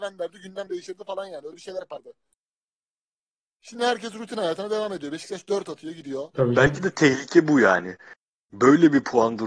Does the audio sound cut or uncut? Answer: cut